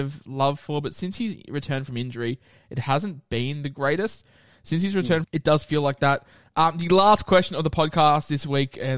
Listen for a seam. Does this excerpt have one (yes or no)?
yes